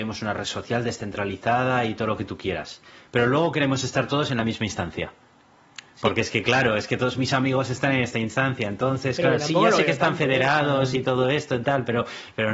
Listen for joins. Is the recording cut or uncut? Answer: uncut